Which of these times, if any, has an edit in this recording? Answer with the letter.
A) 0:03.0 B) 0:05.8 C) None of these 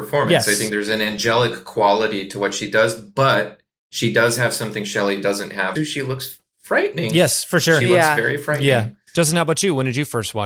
B